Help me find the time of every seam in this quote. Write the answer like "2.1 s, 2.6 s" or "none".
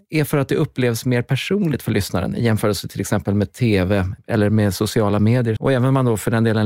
4.2 s, 5.6 s

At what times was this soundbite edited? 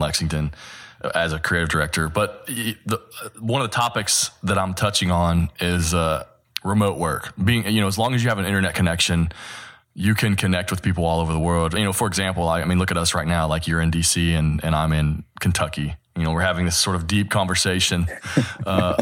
none

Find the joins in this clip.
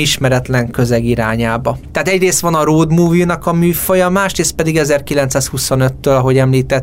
1.9 s

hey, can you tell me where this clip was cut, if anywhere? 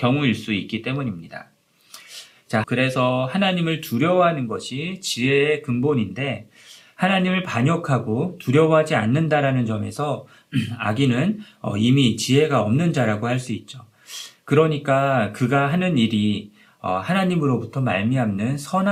2.6 s

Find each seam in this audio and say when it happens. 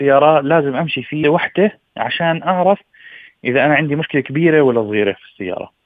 1.2 s

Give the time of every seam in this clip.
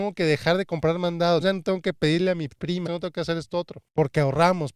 1.4 s, 2.8 s

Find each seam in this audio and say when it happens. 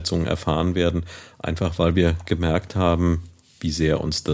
none

